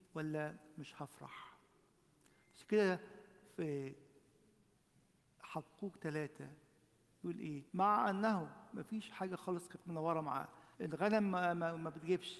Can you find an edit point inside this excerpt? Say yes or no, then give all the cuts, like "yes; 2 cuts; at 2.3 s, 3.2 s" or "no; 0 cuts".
yes; 2 cuts; at 7.7 s, 10.7 s